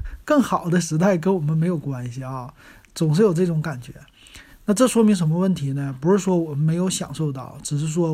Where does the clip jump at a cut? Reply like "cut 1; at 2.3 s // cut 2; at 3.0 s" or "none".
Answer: cut 1; at 4.5 s